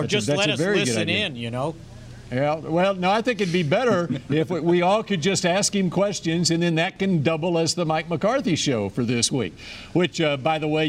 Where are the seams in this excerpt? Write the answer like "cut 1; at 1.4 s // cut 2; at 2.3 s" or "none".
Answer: none